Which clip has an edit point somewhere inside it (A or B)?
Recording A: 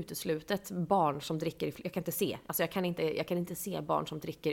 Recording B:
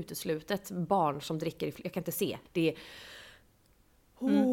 B